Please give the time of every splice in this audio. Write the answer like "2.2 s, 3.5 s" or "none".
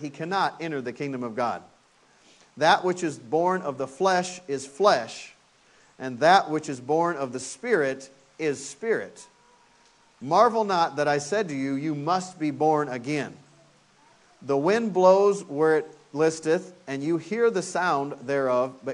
none